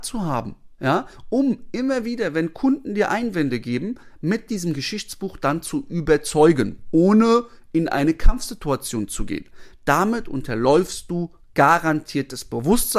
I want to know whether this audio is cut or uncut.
uncut